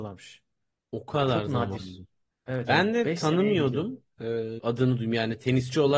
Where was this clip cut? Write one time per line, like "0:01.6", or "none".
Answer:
0:04.6